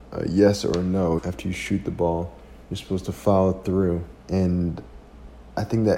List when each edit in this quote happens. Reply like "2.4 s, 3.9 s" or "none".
1.2 s, 4.2 s